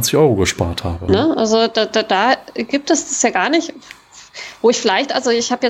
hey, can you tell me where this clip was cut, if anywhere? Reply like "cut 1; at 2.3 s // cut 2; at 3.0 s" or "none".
cut 1; at 1.1 s